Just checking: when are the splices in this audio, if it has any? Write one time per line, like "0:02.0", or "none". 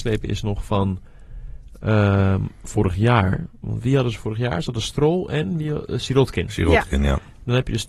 none